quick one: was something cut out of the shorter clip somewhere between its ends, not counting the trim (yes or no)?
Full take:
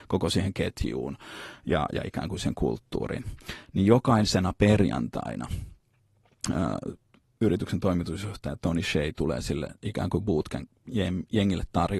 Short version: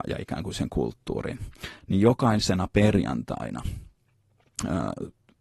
no